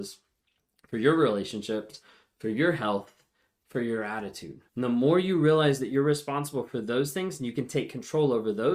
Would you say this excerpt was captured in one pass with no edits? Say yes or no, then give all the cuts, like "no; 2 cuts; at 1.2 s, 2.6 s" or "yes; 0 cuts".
no; 1 cut; at 4.7 s